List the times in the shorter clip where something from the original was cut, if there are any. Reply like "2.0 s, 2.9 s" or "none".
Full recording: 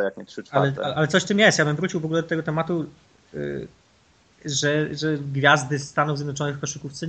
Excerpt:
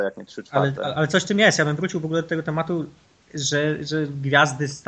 3.1 s